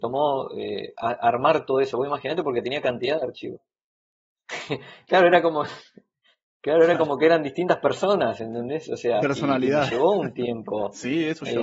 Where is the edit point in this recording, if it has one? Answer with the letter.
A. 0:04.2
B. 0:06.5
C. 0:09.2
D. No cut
C